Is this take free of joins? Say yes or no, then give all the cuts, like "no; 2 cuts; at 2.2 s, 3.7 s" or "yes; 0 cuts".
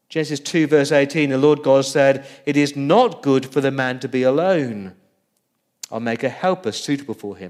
yes; 0 cuts